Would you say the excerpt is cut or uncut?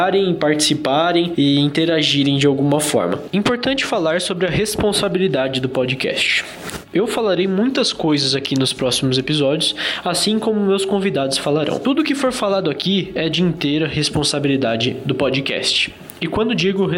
uncut